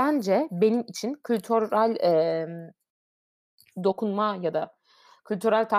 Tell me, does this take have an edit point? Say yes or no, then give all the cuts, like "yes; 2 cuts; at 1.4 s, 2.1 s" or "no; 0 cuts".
no; 0 cuts